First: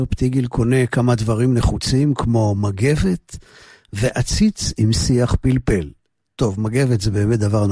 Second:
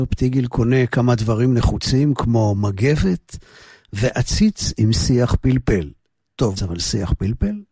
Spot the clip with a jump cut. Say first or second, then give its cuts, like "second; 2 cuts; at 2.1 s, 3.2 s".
second; 1 cut; at 6.6 s